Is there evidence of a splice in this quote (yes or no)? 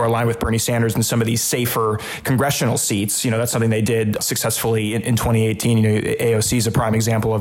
no